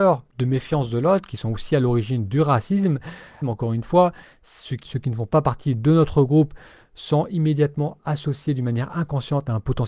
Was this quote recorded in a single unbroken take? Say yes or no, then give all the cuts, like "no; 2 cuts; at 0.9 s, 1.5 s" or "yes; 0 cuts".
no; 2 cuts; at 3.4 s, 4.8 s